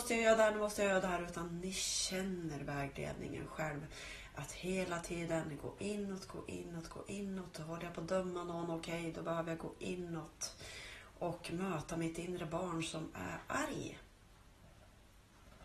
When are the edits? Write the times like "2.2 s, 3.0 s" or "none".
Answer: none